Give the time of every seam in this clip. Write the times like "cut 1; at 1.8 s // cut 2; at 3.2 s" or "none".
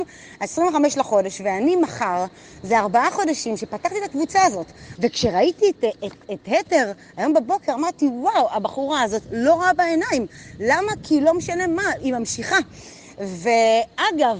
cut 1; at 5.0 s